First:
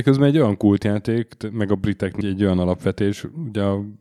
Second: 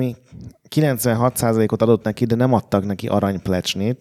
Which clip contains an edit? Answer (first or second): first